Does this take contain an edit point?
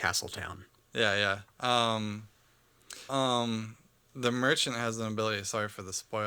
yes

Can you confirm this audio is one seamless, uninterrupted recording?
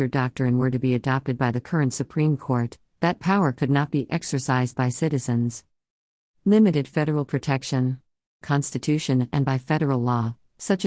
no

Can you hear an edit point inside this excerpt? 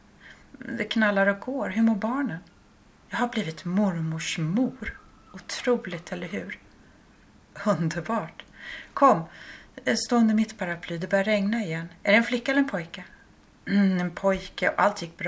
no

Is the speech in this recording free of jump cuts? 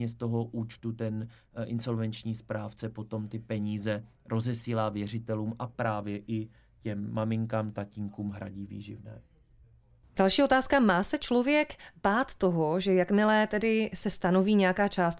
yes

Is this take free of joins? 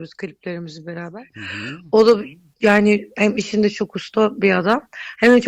yes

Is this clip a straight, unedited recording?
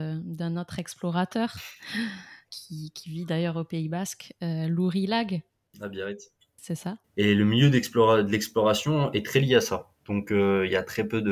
no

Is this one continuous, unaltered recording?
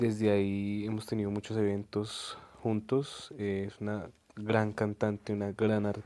yes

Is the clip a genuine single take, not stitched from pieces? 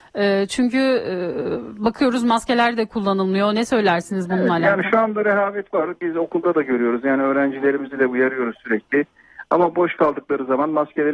yes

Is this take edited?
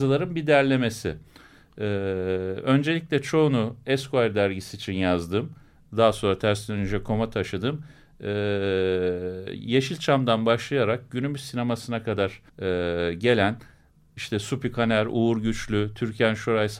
yes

